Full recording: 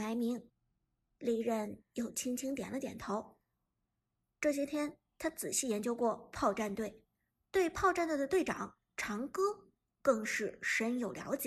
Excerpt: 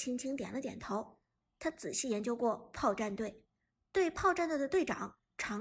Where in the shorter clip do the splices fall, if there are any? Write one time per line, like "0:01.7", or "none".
0:01.4